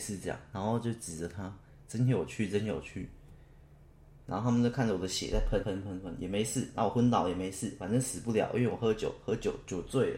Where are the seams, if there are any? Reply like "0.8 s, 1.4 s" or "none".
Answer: 5.6 s